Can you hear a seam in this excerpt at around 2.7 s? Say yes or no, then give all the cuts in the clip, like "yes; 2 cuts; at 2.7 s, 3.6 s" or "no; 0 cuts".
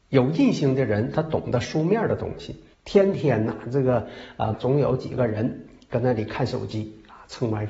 yes; 2 cuts; at 2.7 s, 4.5 s